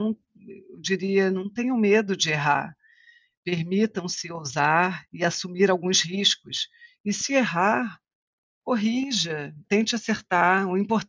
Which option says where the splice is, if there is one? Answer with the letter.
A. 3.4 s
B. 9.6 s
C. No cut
B